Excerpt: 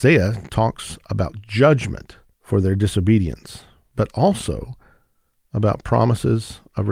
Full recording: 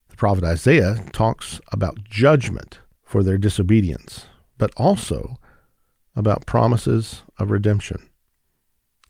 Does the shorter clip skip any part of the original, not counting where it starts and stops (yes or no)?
no